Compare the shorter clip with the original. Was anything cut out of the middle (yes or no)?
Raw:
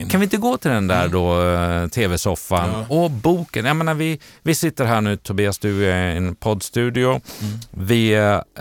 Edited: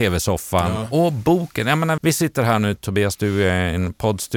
yes